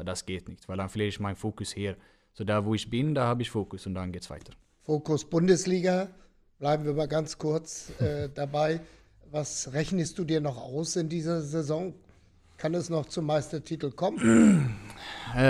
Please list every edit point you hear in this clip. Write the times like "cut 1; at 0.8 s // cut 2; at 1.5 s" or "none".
none